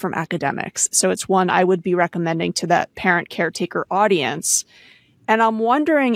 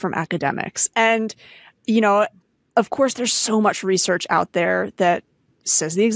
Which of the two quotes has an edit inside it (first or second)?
first